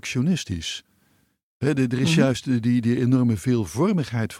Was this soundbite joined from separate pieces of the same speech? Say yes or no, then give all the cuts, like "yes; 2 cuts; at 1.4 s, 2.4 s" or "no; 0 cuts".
no; 0 cuts